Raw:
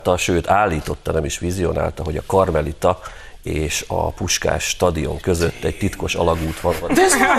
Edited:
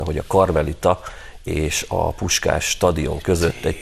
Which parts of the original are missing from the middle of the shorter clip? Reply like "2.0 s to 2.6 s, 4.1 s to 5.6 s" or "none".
none